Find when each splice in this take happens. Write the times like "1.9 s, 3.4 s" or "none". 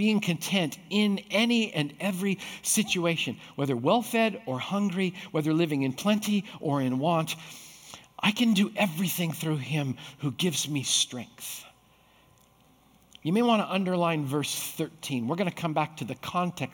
none